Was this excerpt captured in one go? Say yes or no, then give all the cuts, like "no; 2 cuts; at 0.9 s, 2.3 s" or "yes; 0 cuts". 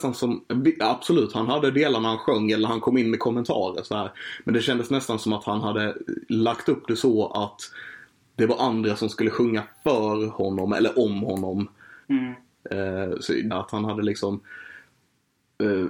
no; 2 cuts; at 12.0 s, 13.5 s